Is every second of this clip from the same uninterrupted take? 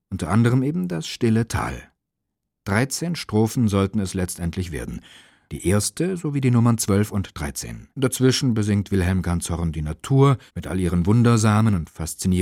no; 3 cuts; at 5.5 s, 7.9 s, 10.5 s

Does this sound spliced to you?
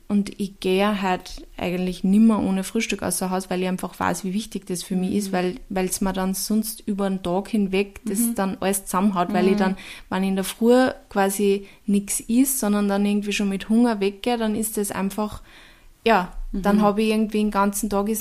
no; 0 cuts

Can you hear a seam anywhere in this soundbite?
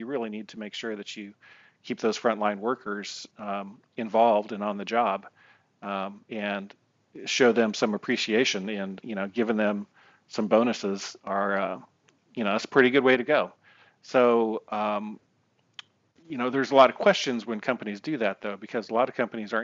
no; 0 cuts

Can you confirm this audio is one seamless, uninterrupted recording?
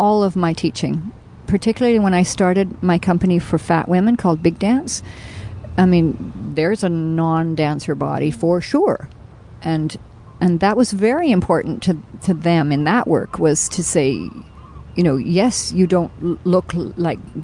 yes; 0 cuts

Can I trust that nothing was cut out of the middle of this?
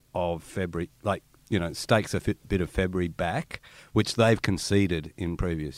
yes; 0 cuts

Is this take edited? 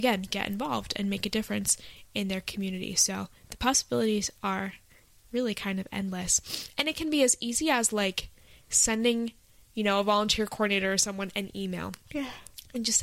no; 0 cuts

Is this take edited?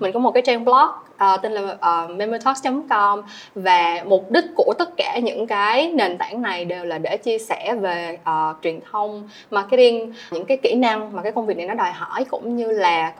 yes; 2 cuts; at 8.6 s, 10.3 s

